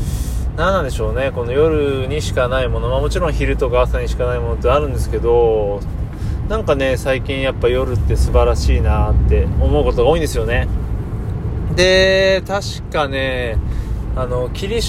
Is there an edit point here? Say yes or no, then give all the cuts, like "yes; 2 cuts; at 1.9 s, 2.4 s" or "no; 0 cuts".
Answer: no; 0 cuts